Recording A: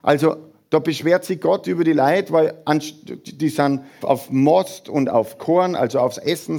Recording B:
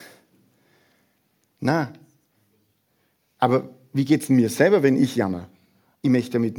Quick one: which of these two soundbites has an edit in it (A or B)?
A